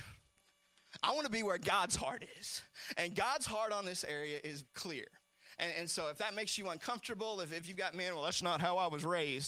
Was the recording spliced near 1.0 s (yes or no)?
no